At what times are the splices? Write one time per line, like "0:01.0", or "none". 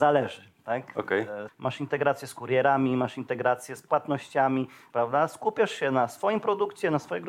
0:01.5
0:04.9